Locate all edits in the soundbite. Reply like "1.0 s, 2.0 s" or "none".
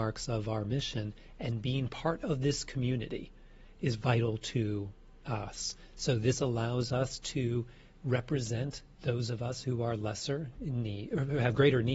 none